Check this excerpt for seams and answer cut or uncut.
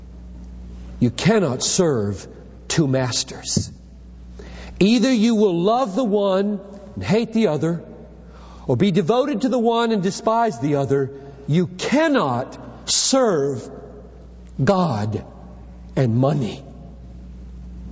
uncut